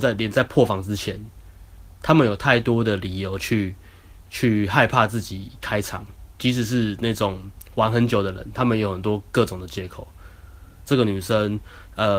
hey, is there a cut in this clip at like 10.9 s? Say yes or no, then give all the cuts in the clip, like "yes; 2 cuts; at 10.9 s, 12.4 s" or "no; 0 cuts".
yes; 1 cut; at 10.9 s